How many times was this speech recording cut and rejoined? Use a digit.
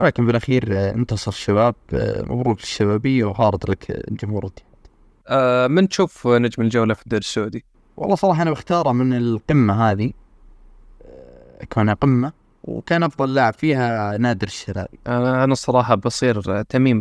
0